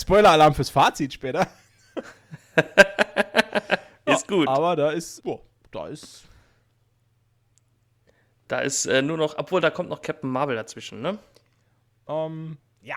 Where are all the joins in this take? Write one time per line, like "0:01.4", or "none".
0:05.2